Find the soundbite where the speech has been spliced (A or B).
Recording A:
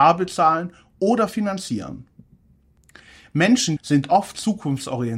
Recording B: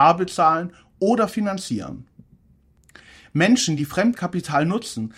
A